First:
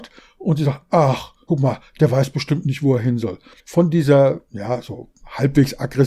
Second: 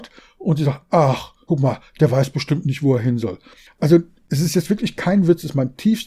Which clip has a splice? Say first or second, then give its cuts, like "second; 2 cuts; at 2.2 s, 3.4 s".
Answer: first; 1 cut; at 3.6 s